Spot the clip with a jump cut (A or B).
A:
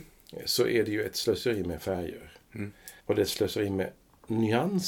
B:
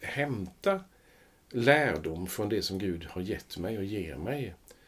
A